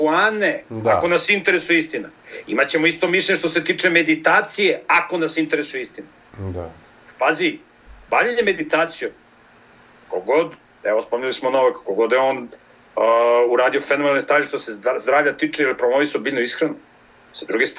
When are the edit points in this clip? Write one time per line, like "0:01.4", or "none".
none